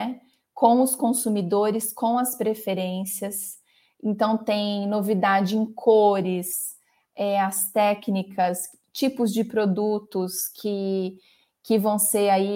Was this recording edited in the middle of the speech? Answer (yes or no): no